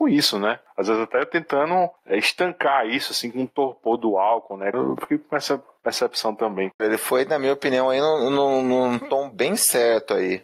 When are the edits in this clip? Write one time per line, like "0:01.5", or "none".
0:04.7
0:06.8